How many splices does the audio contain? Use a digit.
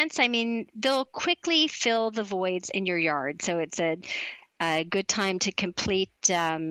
0